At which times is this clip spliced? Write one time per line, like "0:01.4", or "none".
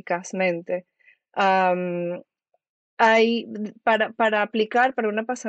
none